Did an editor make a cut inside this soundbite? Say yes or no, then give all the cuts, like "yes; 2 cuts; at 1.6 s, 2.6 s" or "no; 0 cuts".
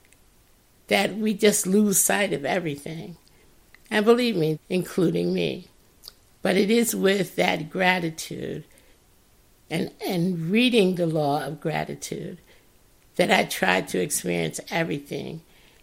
yes; 1 cut; at 4.5 s